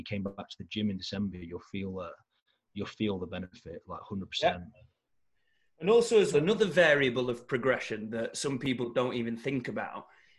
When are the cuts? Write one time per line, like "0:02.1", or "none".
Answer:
0:06.3